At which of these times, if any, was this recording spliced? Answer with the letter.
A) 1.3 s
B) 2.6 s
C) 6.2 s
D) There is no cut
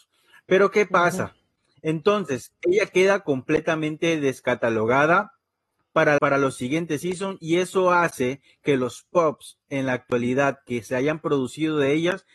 C